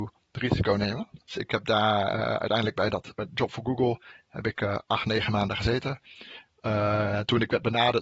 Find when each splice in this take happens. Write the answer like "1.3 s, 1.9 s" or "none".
1.2 s